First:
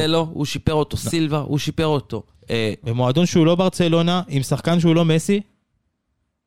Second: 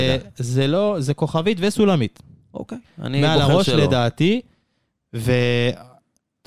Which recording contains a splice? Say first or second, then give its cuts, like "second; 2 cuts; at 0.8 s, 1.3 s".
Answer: first; 1 cut; at 2.8 s